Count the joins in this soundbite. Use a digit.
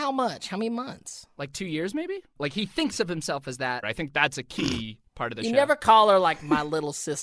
2